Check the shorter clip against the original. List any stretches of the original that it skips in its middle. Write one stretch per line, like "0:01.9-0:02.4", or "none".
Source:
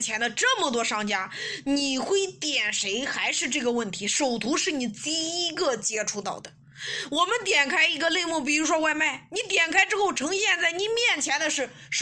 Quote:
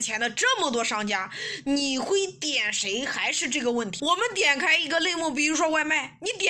0:04.0-0:07.1

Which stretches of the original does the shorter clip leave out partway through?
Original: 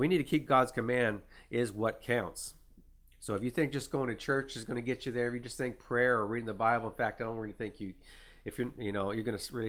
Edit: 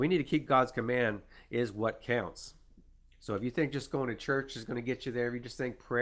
none

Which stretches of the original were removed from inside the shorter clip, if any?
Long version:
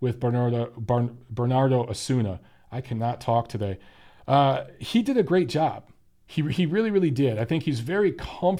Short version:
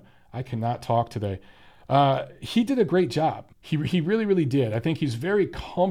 0:05.9-0:06.2

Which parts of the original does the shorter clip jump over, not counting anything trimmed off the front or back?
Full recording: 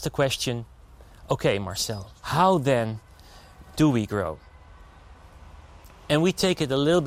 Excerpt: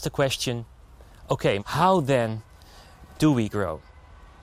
0:01.6-0:02.2

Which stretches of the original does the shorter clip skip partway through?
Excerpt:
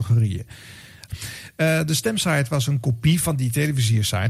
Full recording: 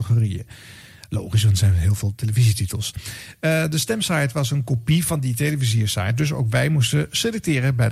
0:01.1-0:02.9

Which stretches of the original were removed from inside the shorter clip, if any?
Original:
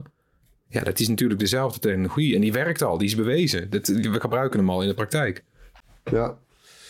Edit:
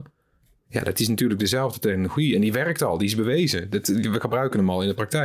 none

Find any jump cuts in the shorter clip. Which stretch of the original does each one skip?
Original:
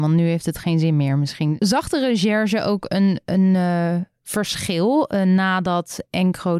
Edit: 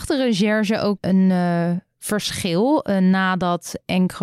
0:02.8-0:03.2

